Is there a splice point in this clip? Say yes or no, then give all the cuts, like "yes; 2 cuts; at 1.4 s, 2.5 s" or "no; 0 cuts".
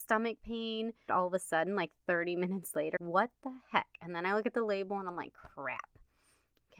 yes; 2 cuts; at 1.1 s, 3.0 s